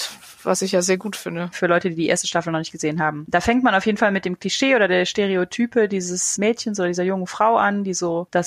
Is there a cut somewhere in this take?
yes; 1 cut; at 1.5 s

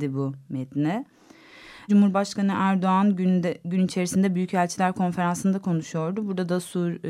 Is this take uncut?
no; 1 cut; at 1.9 s

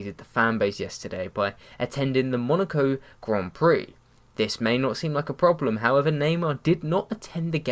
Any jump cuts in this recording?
no; 0 cuts

